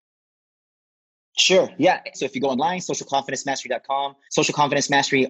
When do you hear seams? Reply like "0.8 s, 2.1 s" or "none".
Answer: 2.1 s, 4.3 s

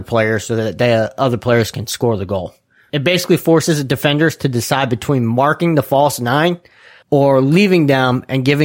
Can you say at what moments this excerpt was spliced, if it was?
7.0 s

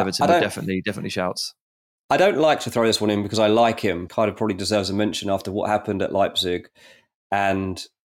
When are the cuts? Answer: 4.1 s

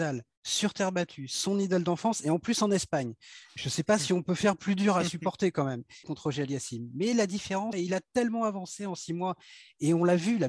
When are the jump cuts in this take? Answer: 6.0 s, 7.7 s

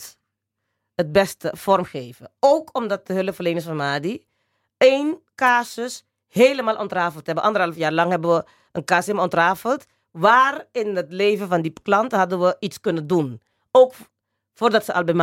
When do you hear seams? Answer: none

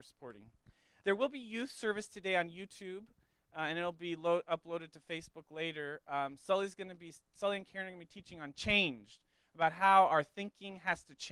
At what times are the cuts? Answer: 1.0 s

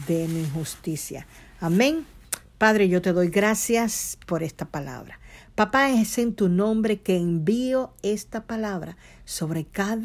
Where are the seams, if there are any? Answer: none

